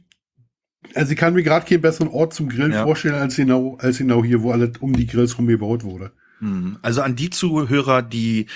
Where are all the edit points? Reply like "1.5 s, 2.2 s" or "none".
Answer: none